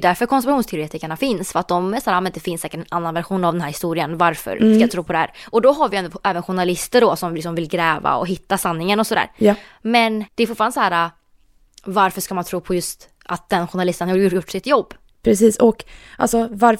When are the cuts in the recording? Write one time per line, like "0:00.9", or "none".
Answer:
0:10.3